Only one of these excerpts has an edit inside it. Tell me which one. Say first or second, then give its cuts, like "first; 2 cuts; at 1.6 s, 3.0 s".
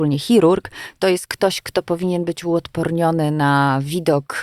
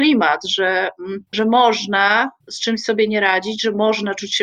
second; 2 cuts; at 1.3 s, 2.4 s